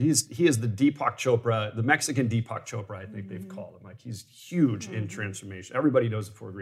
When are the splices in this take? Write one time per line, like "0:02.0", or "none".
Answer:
none